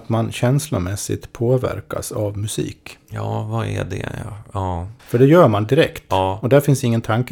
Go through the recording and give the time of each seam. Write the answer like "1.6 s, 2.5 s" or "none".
5.0 s